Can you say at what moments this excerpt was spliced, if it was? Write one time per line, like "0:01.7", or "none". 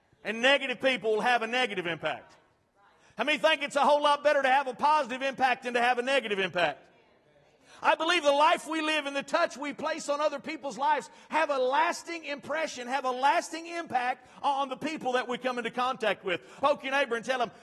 0:16.6